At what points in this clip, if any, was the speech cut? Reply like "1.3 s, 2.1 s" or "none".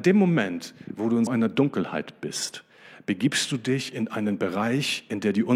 1.3 s